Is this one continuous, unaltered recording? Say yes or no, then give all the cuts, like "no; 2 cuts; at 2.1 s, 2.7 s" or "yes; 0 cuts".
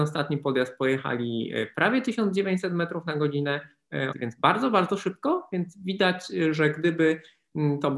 no; 1 cut; at 4.1 s